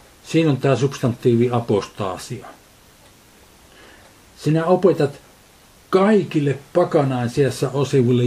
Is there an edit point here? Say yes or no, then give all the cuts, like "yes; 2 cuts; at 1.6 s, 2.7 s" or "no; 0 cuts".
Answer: no; 0 cuts